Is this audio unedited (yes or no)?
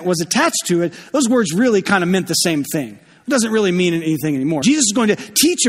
no